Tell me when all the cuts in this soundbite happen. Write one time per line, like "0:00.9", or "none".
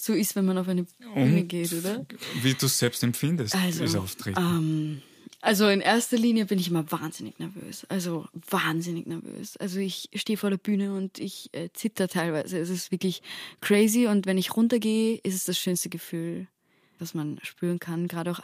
0:17.0